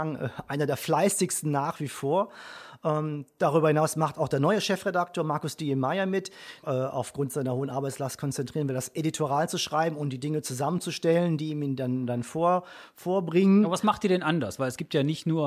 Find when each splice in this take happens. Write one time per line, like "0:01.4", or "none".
0:06.6